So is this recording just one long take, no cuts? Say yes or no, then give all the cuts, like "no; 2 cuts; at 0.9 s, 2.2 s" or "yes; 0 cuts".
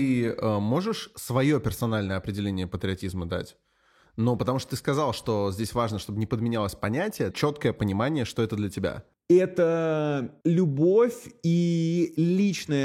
no; 2 cuts; at 7.3 s, 10.4 s